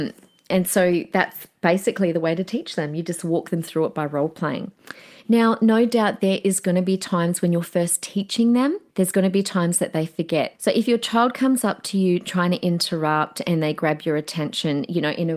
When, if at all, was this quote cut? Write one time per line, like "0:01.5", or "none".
0:08.9
0:10.5